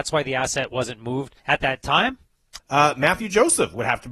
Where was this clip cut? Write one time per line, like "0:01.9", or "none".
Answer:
0:01.4
0:02.6